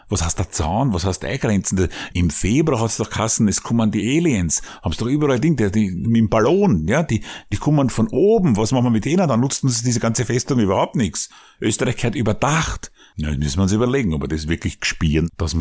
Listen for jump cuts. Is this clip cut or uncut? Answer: cut